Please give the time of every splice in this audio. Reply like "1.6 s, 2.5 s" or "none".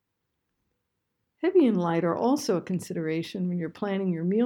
none